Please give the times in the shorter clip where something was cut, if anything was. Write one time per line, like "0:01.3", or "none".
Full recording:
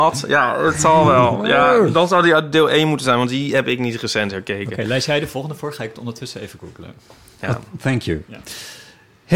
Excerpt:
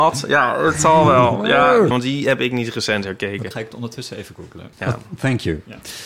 0:01.9
0:03.5
0:04.7